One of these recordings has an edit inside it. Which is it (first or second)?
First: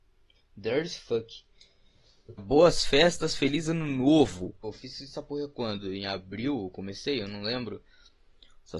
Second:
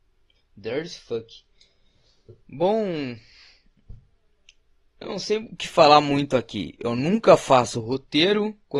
first